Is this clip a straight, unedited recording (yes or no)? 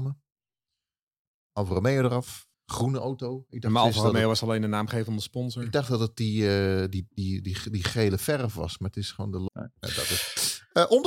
no